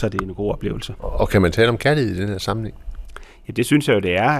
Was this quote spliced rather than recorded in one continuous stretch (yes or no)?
no